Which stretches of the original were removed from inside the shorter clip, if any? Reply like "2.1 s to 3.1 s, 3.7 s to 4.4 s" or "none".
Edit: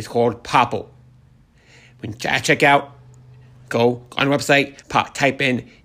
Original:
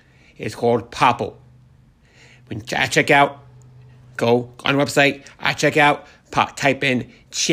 5.3 s to 6.2 s